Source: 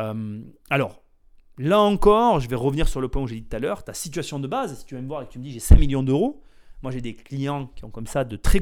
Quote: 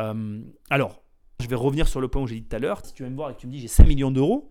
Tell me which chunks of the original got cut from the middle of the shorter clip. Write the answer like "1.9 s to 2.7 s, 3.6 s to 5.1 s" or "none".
1.4 s to 2.4 s, 3.8 s to 4.8 s